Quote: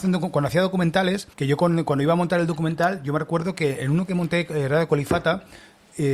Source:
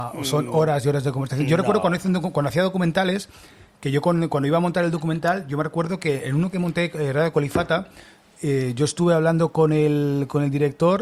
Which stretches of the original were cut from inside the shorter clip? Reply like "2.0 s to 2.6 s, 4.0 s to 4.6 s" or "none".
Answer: 3.3 s to 3.8 s